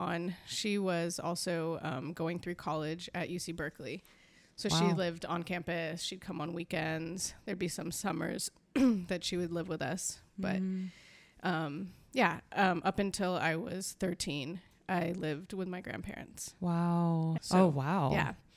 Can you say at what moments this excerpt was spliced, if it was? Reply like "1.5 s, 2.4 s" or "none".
17.4 s